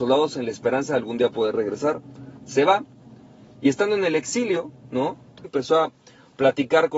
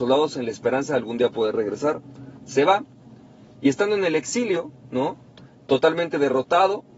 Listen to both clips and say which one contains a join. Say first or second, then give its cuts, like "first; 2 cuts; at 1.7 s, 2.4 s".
first; 1 cut; at 5.4 s